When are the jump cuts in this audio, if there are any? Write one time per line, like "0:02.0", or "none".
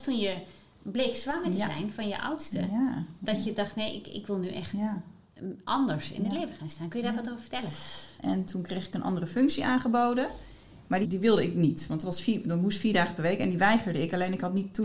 0:08.2
0:11.0

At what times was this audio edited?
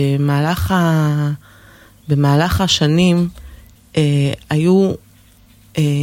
0:03.8

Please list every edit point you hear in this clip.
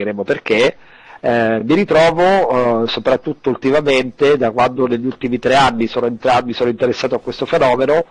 none

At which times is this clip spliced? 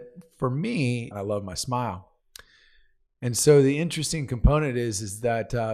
0:01.1

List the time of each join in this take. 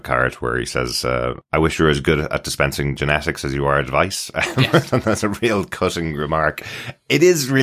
none

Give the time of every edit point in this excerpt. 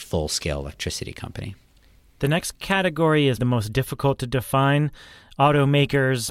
0:03.4

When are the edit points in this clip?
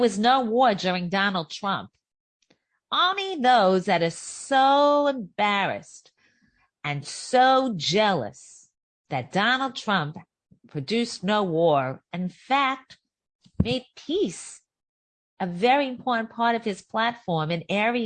none

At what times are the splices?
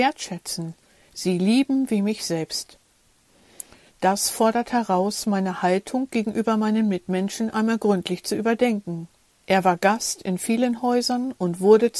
0:09.4

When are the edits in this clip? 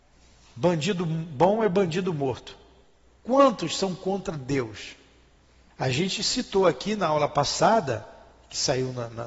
0:03.2
0:05.7

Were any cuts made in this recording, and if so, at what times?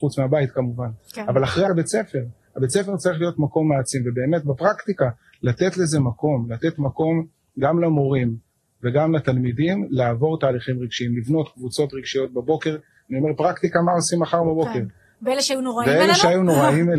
0:01.7
0:15.2

